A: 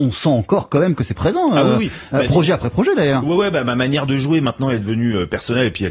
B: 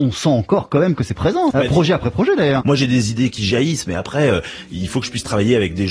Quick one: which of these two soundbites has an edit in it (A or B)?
B